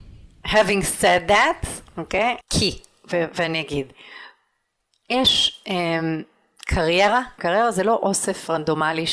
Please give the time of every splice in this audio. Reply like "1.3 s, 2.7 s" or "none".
2.4 s, 7.4 s